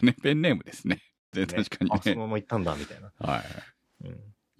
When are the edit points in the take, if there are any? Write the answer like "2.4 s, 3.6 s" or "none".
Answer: 1.3 s